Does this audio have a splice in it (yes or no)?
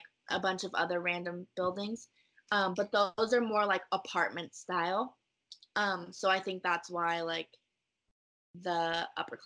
no